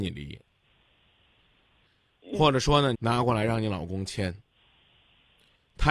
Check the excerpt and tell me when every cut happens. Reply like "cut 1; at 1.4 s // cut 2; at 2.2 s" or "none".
cut 1; at 2.9 s